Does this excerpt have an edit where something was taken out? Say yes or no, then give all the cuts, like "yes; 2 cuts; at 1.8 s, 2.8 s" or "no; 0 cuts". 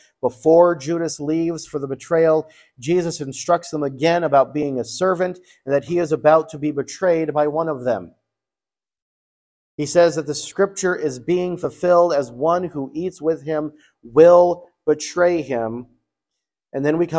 no; 0 cuts